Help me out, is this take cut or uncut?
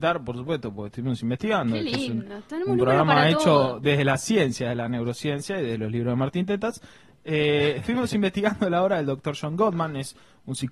uncut